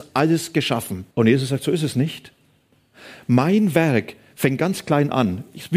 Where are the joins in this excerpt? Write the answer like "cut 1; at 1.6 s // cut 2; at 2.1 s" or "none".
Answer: cut 1; at 1.1 s